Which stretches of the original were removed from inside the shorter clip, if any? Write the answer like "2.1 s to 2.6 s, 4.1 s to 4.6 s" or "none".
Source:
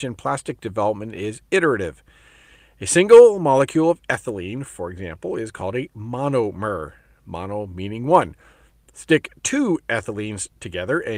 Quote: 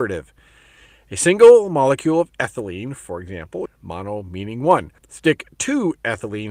5.4 s to 7.1 s, 8.4 s to 8.8 s